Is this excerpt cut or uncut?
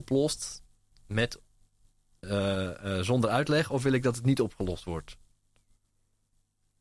uncut